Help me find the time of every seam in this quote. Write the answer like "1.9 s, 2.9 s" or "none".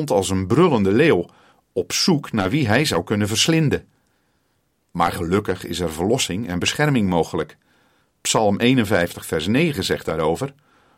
8.0 s